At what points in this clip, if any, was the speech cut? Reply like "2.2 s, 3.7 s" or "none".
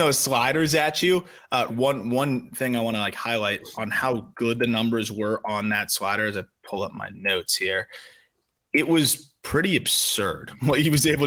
1.7 s